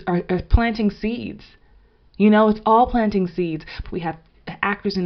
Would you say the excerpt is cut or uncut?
cut